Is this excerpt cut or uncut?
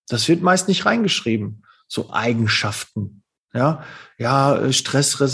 uncut